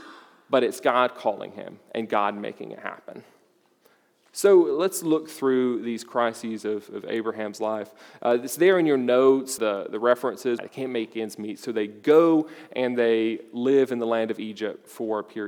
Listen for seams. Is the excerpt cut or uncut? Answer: cut